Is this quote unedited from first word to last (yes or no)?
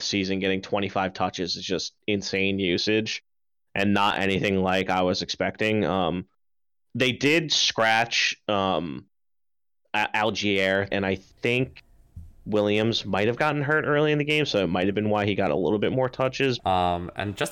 no